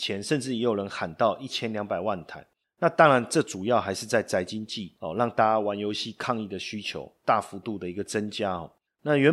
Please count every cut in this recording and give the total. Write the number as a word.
zero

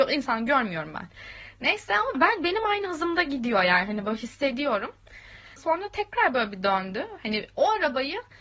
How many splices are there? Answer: two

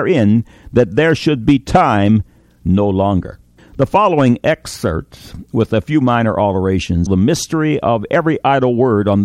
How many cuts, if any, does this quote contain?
two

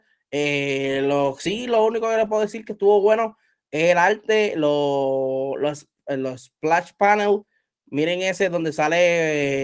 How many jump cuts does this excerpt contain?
zero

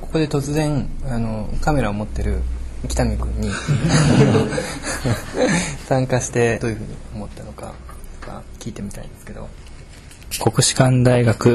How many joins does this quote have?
two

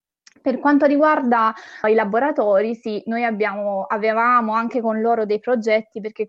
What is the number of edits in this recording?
one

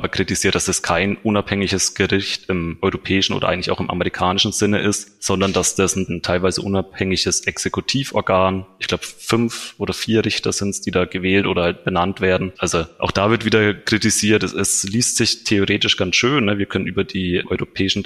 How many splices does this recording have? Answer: one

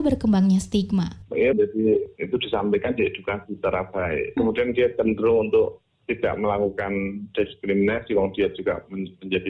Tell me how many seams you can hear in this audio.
two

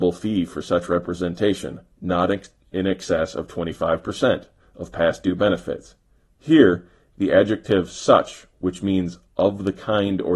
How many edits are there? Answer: zero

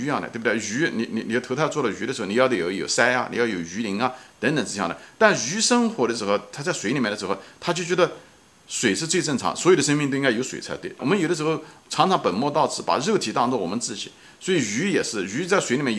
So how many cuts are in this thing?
one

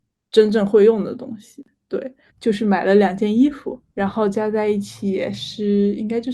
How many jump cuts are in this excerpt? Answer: two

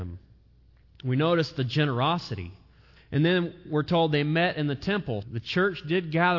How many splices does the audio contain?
two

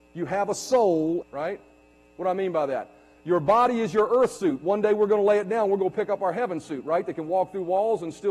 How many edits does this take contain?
one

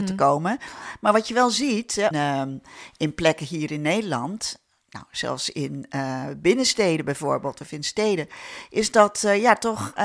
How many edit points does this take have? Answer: one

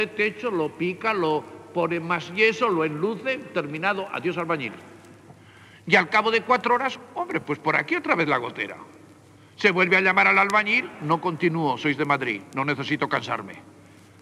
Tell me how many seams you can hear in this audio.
zero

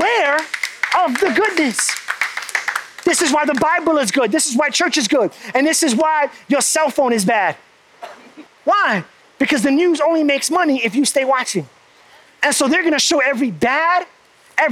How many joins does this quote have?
two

